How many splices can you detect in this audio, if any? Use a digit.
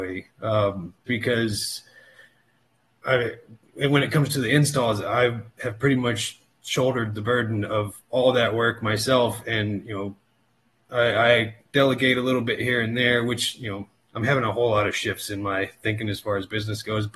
1